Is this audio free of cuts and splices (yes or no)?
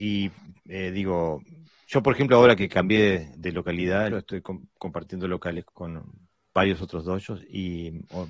no